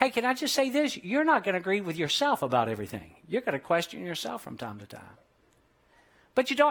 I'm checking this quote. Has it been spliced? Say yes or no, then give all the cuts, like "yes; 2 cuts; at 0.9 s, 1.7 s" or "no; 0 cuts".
no; 0 cuts